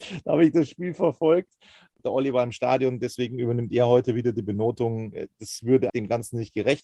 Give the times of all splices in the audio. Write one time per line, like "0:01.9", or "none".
0:02.0
0:05.9